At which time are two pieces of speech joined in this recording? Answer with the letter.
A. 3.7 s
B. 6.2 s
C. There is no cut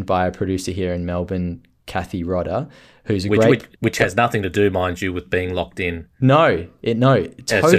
A